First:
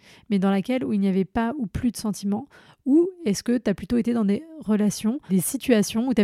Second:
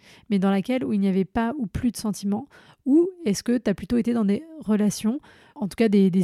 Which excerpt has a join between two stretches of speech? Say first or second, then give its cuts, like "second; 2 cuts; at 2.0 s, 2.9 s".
first; 1 cut; at 5.3 s